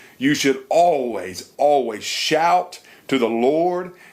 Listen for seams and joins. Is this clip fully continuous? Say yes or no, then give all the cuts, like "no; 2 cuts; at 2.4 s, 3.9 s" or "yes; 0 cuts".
no; 1 cut; at 1.5 s